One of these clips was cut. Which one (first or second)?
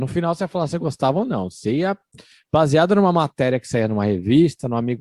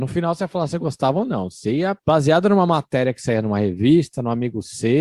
second